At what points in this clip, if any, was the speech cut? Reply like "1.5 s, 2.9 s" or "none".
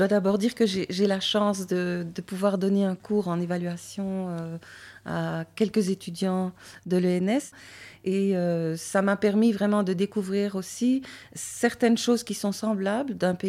none